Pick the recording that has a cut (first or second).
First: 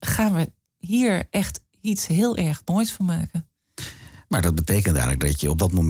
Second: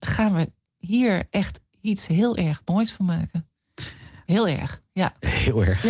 second